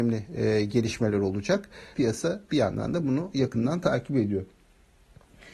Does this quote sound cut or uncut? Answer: cut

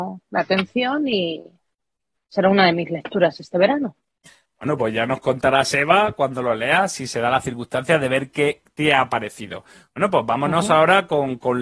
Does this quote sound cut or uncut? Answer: uncut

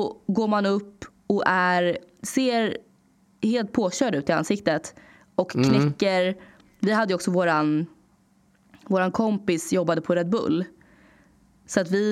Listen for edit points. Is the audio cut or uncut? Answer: uncut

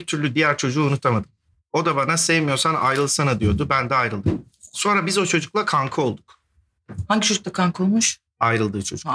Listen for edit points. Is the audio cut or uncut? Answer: uncut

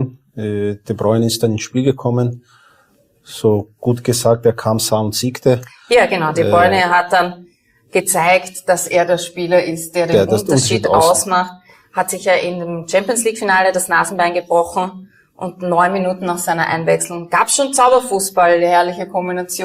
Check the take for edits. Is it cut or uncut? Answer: uncut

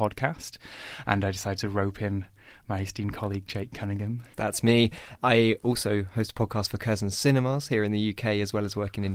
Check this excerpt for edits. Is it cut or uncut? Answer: uncut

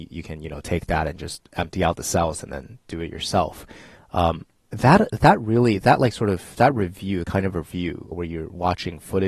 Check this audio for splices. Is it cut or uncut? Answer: cut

